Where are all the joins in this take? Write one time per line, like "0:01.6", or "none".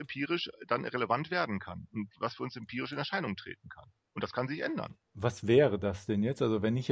0:05.1